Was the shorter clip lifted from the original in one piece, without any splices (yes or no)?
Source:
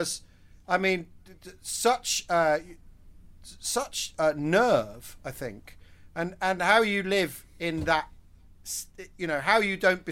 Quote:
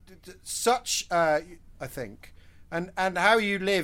no